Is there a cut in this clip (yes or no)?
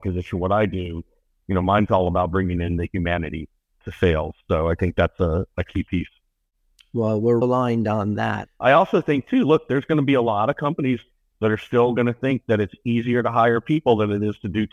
yes